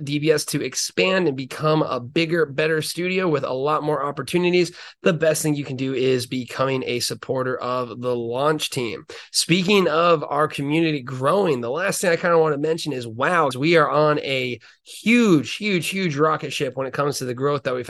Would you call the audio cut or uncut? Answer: cut